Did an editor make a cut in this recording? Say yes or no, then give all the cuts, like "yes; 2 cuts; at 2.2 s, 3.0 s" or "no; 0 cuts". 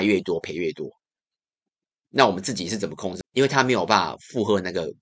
yes; 1 cut; at 3.2 s